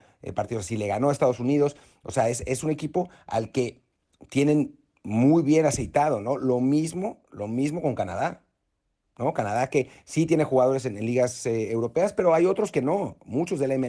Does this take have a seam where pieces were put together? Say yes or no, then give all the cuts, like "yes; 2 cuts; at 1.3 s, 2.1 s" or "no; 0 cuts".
no; 0 cuts